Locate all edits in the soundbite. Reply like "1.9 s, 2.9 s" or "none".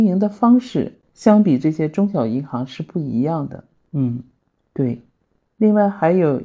3.9 s